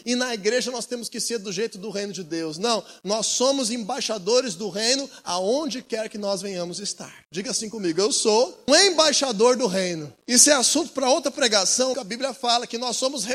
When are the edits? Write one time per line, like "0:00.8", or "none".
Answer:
0:08.7
0:10.2
0:11.9

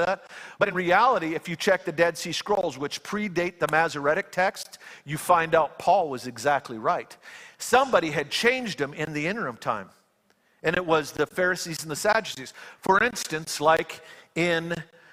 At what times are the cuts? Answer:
none

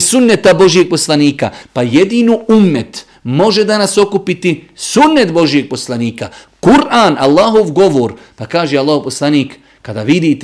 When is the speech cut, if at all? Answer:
0:01.6

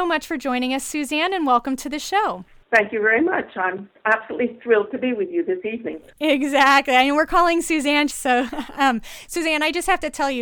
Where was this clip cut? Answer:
0:08.1

